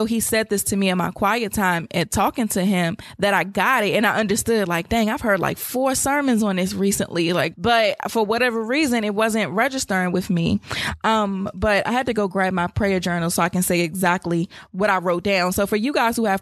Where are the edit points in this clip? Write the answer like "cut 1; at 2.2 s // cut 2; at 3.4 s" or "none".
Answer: cut 1; at 7.5 s